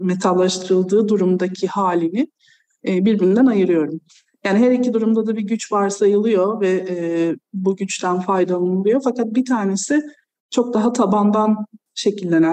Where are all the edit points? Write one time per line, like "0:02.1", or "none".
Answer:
none